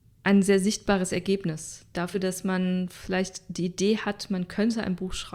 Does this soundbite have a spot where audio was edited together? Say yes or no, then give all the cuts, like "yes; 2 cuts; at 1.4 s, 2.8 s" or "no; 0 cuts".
no; 0 cuts